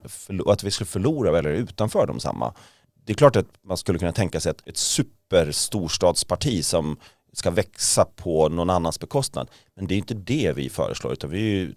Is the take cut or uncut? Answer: uncut